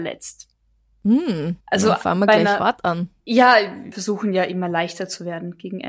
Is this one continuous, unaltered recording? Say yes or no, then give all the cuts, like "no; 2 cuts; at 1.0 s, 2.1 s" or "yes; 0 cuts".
no; 2 cuts; at 1.6 s, 3.9 s